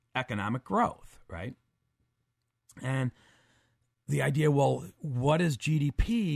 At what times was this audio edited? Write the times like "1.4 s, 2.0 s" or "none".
none